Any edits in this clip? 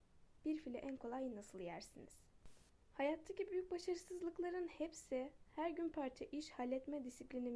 yes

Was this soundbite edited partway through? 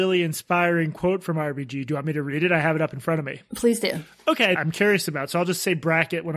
yes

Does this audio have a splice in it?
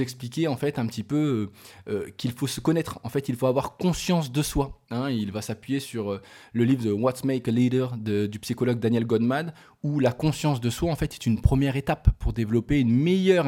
no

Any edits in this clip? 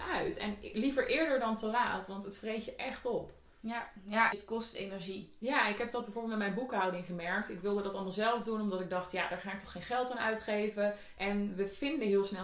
yes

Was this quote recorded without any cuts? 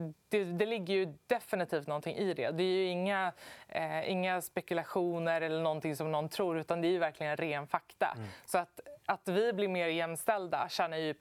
yes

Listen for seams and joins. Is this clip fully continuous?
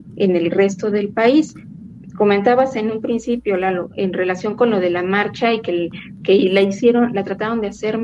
yes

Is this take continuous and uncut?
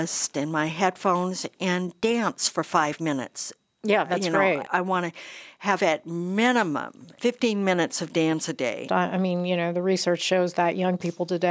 no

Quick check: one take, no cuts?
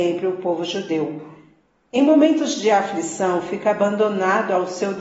yes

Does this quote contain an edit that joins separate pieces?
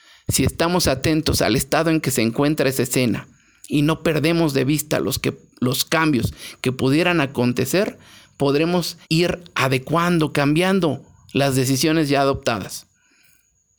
yes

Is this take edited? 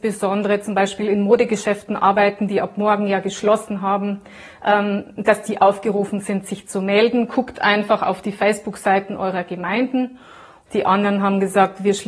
yes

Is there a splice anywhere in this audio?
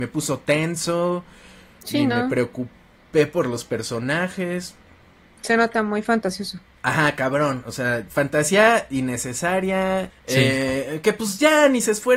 yes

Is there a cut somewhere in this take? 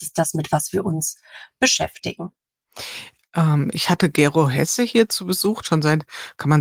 yes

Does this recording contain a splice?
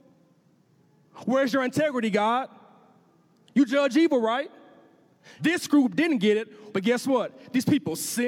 yes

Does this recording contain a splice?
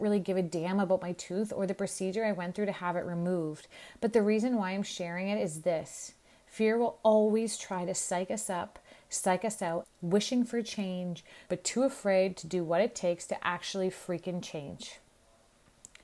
yes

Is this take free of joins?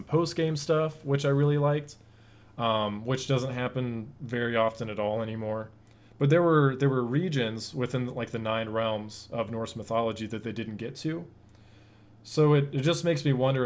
yes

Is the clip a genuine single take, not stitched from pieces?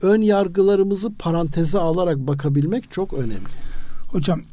no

